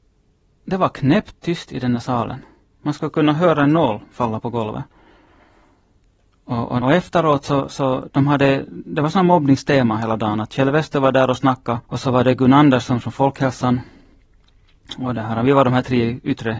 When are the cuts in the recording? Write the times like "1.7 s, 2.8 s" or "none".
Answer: 6.8 s, 11.8 s